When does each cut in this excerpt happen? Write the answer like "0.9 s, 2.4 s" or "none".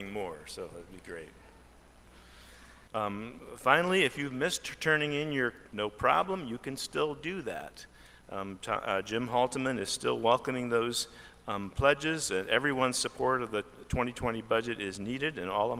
5.7 s